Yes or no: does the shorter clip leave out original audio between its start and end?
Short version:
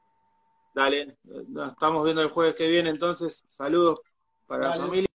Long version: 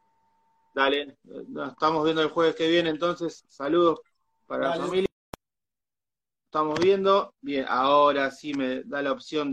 no